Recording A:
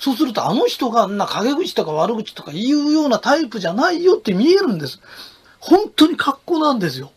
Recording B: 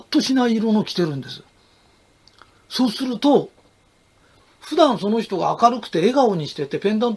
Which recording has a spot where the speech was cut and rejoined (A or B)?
A